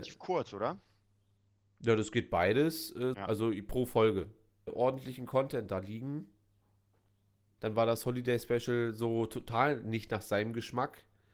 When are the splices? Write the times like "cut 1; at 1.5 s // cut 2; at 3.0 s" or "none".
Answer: cut 1; at 3.1 s // cut 2; at 4.7 s // cut 3; at 7.6 s